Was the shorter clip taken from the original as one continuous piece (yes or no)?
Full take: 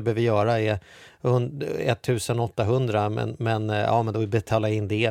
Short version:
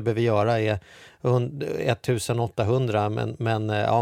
yes